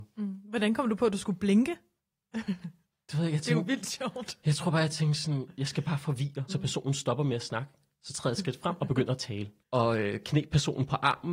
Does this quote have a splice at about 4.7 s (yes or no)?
no